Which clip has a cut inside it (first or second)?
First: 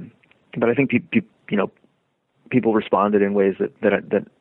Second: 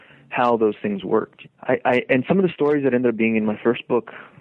second